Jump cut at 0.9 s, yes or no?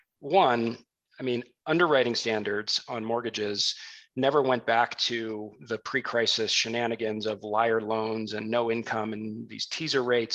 no